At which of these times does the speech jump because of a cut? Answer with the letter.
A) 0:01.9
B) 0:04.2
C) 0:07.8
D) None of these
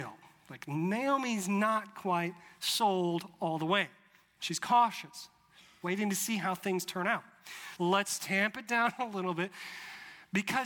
C